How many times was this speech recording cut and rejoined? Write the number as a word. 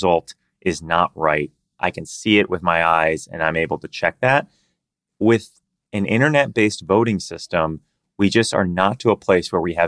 zero